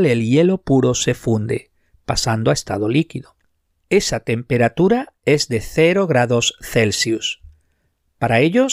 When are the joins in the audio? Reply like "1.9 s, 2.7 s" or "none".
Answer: none